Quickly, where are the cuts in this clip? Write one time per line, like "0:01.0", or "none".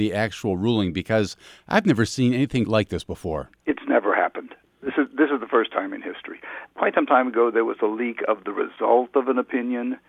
0:02.7